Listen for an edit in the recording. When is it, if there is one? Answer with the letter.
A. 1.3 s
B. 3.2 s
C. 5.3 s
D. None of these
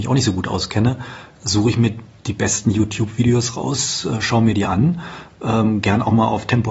D